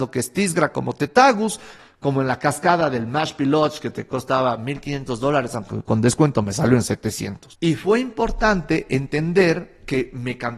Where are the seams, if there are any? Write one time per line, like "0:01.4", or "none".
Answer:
none